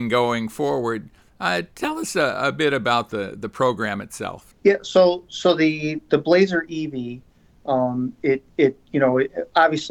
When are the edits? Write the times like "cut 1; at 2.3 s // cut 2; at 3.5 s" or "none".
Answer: none